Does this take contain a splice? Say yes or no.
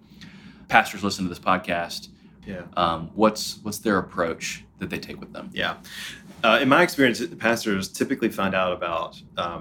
yes